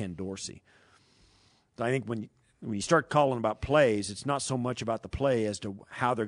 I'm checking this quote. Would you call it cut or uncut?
uncut